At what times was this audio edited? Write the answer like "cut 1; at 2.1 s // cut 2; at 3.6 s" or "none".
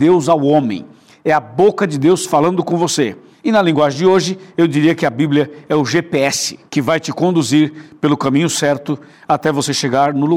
cut 1; at 3.3 s // cut 2; at 6.7 s